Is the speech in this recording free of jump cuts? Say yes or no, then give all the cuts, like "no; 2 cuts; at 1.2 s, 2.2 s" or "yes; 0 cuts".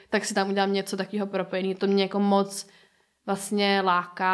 yes; 0 cuts